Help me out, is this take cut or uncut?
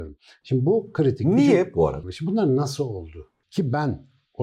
cut